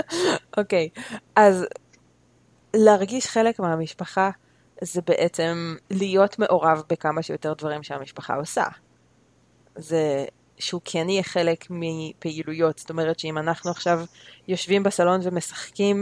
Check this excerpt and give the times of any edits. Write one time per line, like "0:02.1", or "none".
0:05.8